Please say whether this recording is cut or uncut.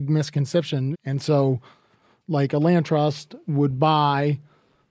cut